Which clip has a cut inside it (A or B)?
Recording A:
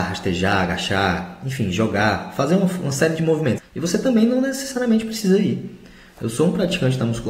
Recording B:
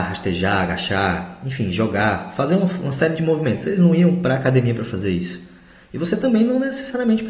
A